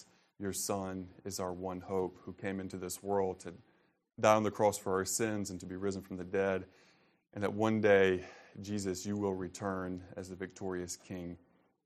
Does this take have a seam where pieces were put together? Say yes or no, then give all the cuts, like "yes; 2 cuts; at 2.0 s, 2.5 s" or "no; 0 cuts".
no; 0 cuts